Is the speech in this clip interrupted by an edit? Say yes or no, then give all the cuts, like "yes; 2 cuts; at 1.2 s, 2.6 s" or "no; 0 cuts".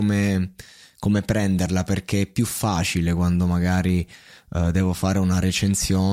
no; 0 cuts